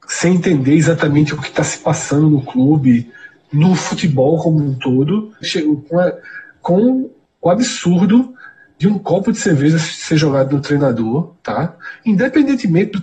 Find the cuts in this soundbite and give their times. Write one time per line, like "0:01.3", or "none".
0:05.4
0:11.4

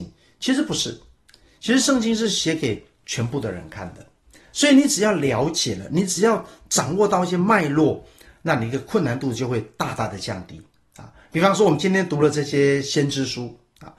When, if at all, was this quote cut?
none

